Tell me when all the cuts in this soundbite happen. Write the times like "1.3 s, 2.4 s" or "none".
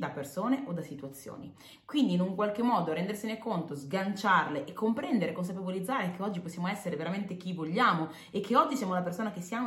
none